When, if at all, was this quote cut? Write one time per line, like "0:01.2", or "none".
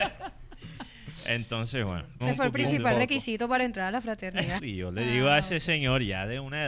0:02.2
0:04.6